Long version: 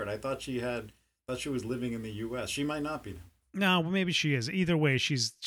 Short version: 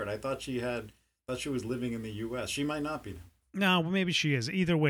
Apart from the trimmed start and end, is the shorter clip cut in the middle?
no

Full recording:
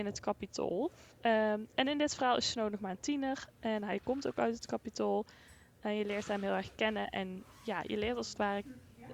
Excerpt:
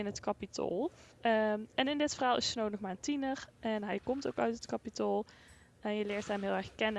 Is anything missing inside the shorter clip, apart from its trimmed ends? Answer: no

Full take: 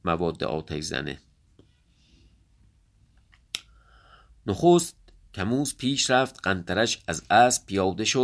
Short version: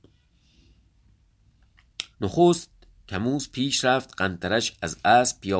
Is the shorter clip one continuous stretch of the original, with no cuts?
no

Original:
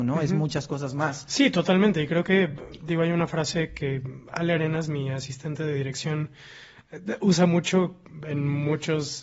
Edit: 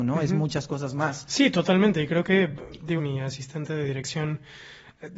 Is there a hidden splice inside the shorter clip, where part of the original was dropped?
yes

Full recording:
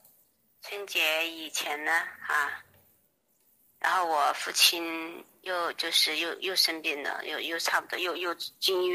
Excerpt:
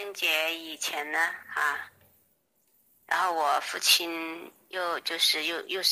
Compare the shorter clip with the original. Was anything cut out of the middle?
no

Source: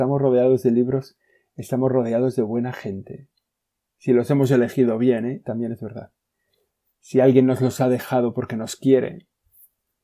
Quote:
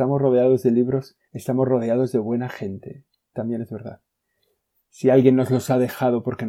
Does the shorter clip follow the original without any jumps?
no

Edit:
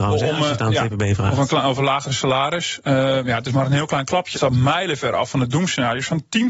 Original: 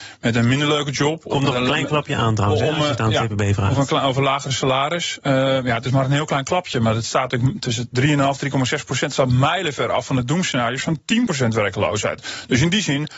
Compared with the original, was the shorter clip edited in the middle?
yes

